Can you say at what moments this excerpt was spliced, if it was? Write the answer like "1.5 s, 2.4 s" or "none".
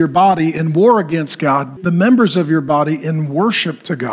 1.8 s